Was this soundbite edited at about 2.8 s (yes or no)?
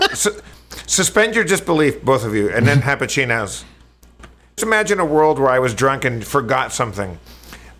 yes